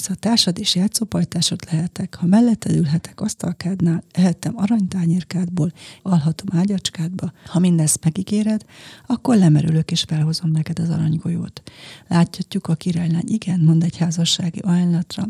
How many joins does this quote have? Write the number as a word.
two